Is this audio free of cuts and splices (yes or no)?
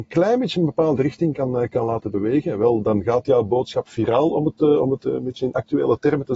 yes